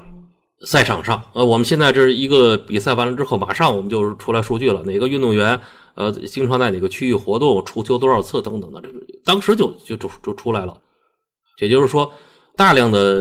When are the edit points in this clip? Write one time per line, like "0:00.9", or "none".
none